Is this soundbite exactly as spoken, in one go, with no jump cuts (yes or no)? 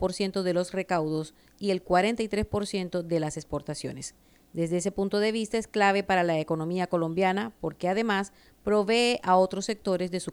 yes